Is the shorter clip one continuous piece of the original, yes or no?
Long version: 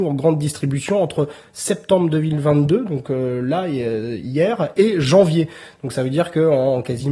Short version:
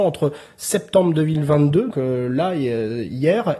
no